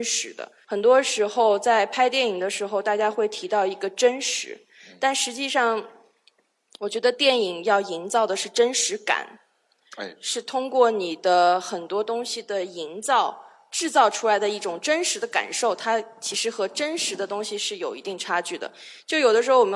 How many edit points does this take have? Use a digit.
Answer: 0